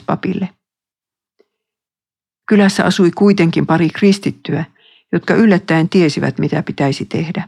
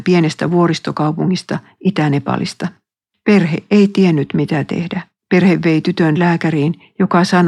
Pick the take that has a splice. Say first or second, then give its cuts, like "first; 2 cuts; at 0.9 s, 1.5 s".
second; 2 cuts; at 3.1 s, 5.2 s